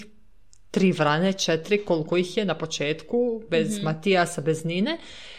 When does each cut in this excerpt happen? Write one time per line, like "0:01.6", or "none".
none